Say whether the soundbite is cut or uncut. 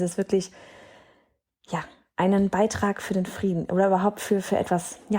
uncut